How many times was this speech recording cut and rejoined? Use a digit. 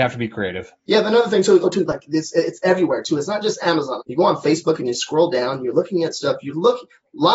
2